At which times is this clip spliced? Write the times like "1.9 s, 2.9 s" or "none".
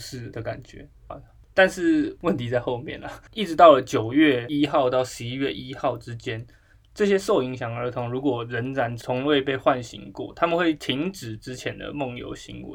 1.1 s, 3.3 s